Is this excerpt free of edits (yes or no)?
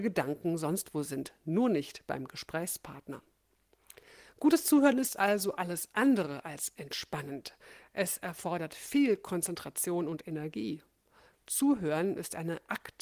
yes